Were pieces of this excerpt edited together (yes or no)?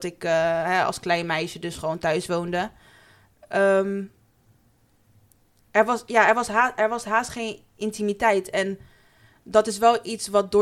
no